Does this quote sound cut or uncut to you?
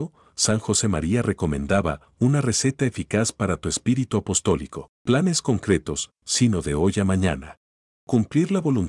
cut